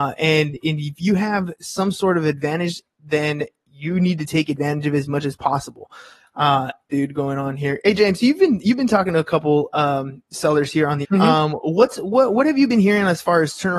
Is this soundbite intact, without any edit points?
no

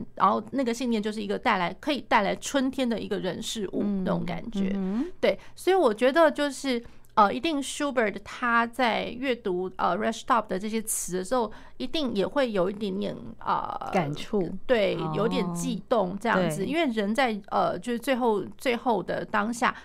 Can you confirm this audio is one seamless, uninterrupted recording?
yes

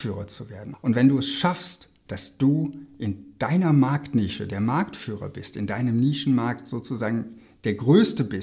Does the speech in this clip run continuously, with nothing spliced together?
no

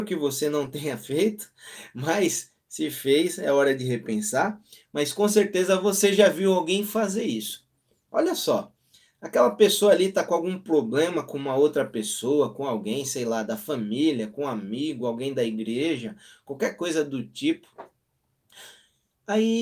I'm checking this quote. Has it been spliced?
no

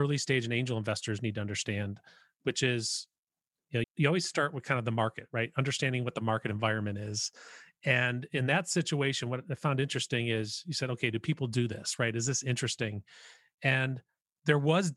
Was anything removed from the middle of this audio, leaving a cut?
yes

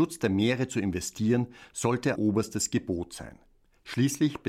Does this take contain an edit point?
yes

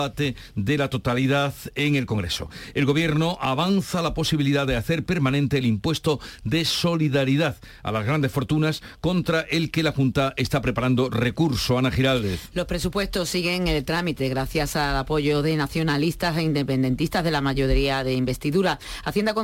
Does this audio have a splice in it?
no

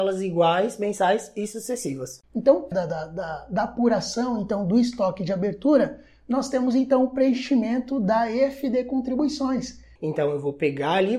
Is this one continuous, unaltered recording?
no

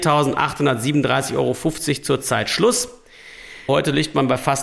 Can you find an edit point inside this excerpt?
yes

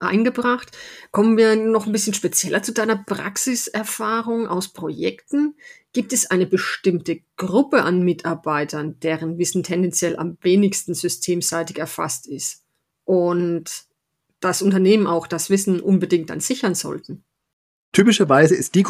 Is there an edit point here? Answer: no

